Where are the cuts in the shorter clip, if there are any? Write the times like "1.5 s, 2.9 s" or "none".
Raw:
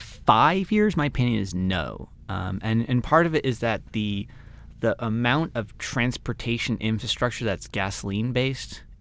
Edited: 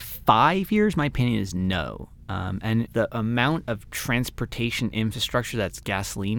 2.9 s